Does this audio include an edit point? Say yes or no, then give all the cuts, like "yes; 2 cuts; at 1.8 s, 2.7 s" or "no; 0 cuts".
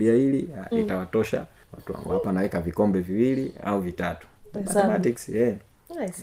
no; 0 cuts